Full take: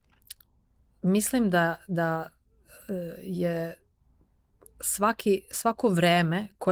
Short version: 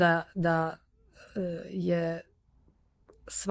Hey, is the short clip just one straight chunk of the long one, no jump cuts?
yes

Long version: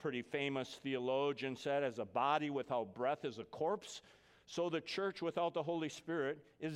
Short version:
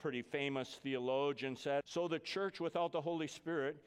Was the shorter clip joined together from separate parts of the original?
yes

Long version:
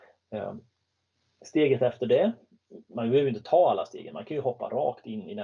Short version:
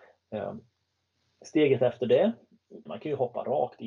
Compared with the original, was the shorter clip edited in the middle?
yes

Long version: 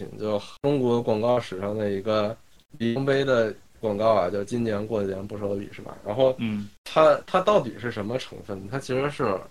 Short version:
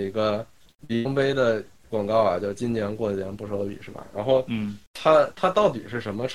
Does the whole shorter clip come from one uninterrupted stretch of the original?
yes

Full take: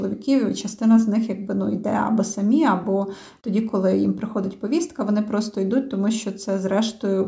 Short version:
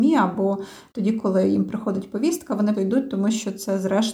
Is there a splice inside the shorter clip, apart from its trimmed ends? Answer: yes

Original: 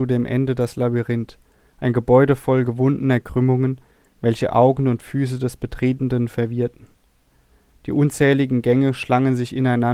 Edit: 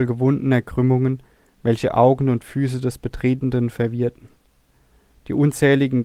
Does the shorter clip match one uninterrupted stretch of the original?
yes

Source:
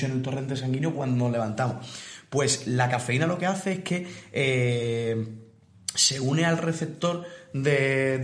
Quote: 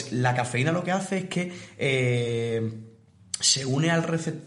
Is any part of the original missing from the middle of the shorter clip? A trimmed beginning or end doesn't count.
no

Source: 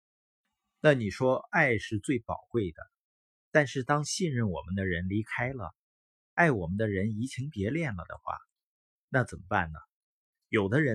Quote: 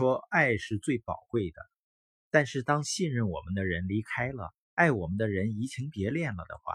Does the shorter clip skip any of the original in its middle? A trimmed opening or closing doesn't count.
yes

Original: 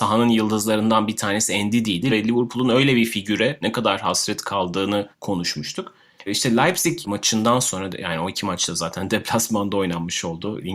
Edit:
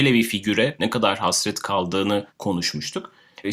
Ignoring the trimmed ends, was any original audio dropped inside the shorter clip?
no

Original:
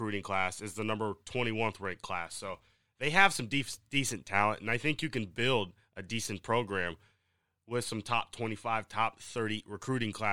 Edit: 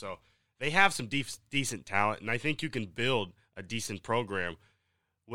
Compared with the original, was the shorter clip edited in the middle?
no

